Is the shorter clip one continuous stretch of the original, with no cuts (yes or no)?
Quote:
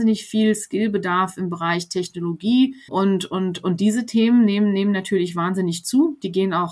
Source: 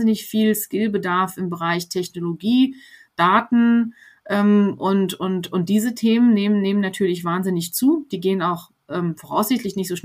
no